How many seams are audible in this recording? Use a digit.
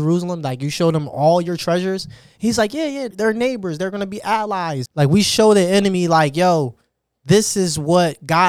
2